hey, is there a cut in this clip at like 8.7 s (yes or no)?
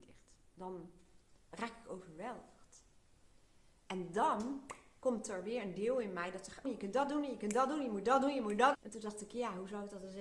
yes